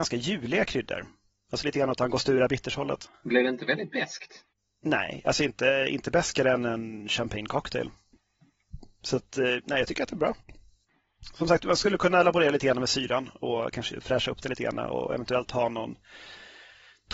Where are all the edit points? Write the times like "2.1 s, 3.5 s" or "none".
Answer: none